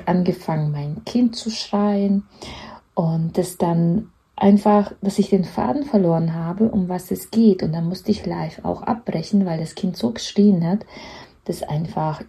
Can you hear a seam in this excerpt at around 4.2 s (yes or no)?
no